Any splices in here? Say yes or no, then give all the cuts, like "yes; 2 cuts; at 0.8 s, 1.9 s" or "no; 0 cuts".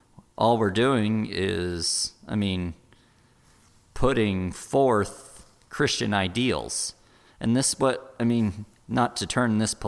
no; 0 cuts